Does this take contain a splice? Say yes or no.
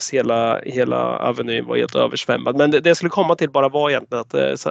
no